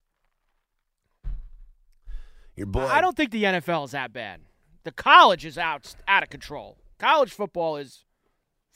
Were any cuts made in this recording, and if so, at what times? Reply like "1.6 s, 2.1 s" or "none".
none